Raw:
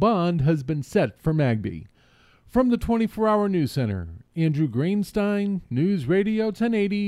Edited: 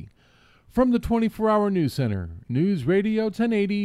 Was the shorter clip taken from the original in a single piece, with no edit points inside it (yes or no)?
no